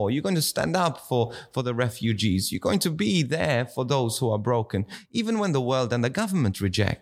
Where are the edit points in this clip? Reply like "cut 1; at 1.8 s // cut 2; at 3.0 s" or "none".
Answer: none